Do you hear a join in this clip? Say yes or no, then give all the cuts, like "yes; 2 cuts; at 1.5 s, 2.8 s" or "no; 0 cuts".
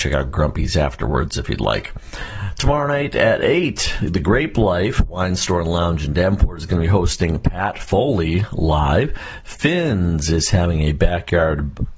no; 0 cuts